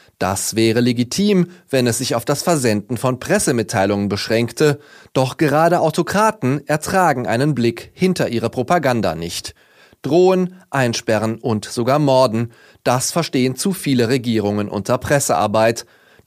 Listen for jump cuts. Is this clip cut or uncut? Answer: uncut